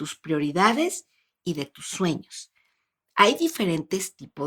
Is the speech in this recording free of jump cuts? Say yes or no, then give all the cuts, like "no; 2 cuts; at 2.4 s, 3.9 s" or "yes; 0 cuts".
yes; 0 cuts